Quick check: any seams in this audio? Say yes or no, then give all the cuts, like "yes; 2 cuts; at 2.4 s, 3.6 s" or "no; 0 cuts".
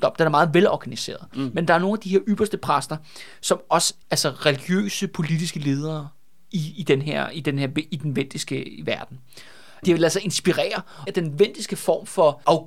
yes; 3 cuts; at 4.0 s, 9.8 s, 11.1 s